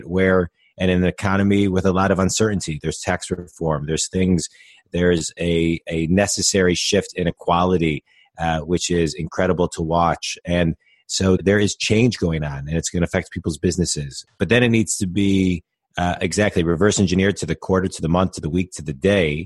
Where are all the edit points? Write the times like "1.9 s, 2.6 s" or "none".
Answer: 11.4 s, 14.3 s